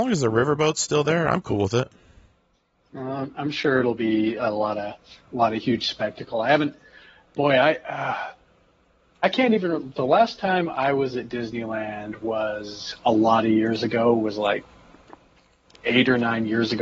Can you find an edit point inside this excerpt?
no; 0 cuts

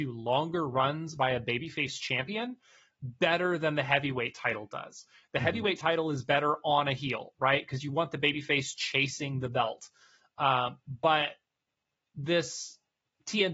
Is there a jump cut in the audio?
no; 0 cuts

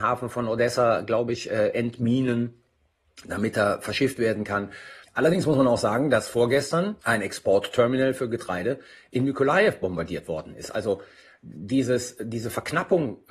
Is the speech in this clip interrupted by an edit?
yes; 1 cut; at 5.0 s

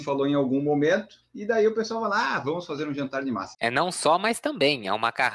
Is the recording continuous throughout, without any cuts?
no; 1 cut; at 3.5 s

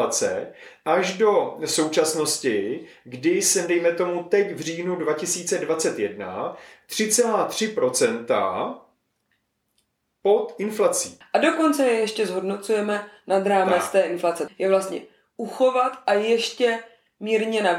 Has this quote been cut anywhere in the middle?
yes; 2 cuts; at 11.2 s, 14.5 s

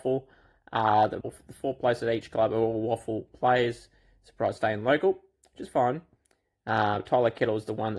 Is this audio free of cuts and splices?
no; 2 cuts; at 1.2 s, 4.6 s

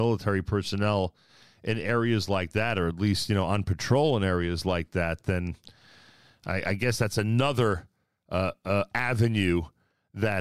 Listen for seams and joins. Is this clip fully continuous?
yes; 0 cuts

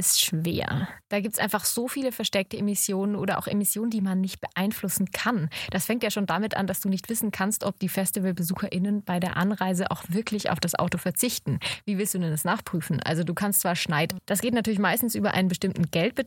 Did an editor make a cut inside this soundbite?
yes; 1 cut; at 14.2 s

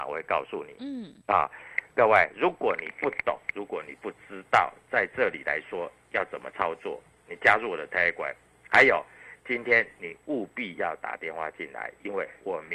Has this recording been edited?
no; 0 cuts

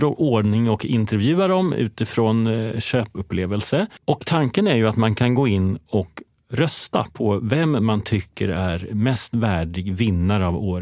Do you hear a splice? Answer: no; 0 cuts

